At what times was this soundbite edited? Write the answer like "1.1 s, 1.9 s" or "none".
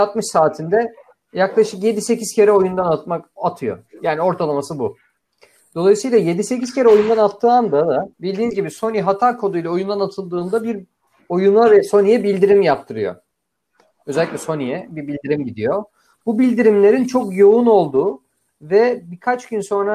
8.1 s